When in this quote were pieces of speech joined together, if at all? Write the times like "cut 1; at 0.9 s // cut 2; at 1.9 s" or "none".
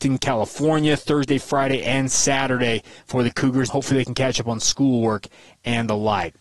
cut 1; at 3.7 s